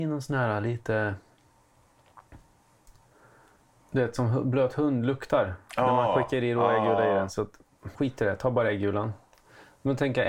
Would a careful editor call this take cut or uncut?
cut